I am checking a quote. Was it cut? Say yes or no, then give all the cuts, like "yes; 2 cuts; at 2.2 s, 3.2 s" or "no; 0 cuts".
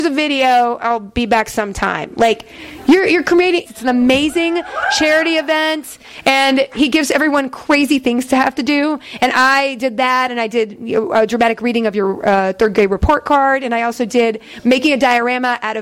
yes; 1 cut; at 3.7 s